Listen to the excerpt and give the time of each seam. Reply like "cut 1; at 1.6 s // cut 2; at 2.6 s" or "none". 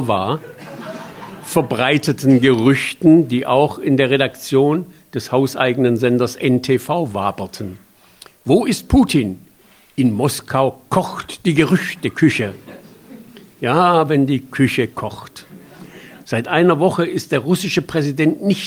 cut 1; at 16.2 s